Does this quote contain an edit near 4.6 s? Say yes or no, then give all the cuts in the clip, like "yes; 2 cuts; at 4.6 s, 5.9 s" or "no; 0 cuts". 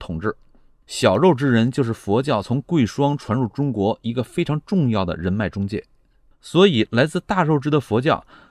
no; 1 cut; at 6.3 s